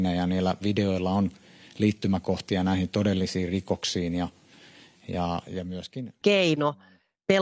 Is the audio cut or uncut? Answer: cut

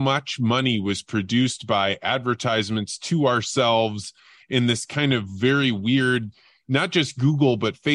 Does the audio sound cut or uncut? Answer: uncut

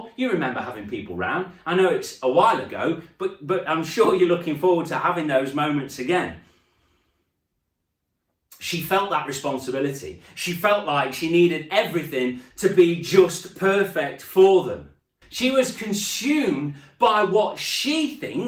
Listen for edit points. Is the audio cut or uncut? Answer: cut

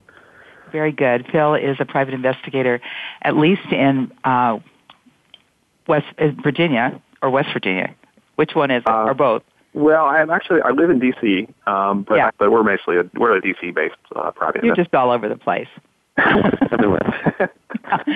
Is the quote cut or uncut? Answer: cut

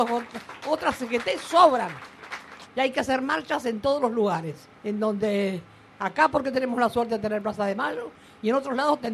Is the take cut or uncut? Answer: cut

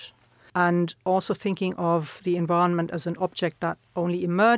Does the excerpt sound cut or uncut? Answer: uncut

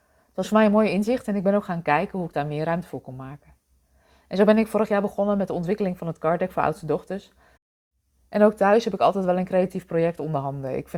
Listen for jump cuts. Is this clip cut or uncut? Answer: uncut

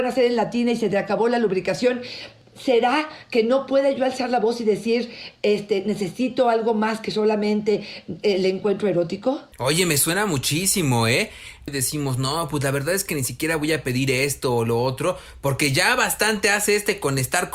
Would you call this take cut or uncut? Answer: cut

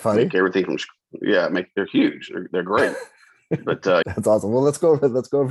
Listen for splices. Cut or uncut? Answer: cut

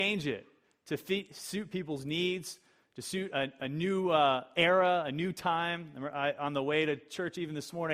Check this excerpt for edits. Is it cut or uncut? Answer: uncut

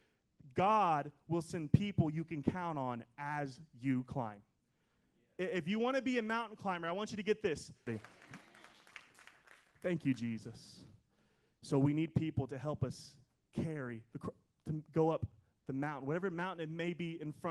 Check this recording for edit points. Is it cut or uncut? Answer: cut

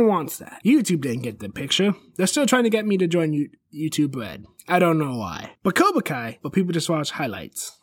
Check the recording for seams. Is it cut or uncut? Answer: cut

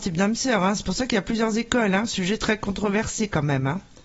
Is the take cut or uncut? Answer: uncut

